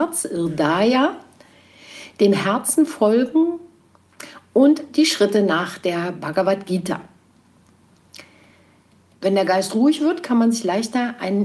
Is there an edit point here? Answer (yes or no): yes